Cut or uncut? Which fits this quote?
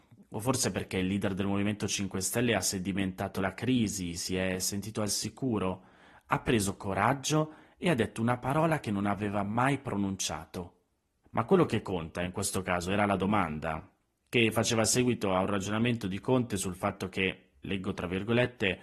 cut